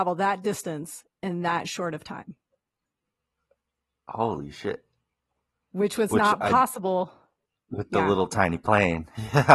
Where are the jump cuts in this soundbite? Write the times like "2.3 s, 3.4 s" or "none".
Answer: none